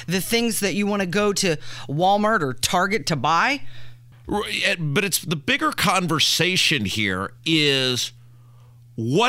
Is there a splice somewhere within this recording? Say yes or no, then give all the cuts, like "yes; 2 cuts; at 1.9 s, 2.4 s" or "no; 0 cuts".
yes; 1 cut; at 4.1 s